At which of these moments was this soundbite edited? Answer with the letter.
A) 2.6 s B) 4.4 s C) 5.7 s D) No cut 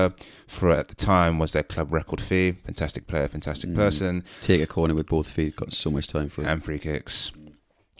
D